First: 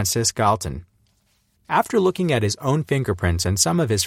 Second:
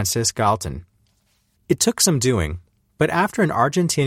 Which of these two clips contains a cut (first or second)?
first